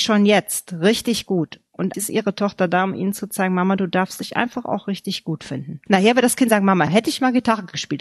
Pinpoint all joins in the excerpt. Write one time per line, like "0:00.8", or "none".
0:01.9
0:05.9
0:06.9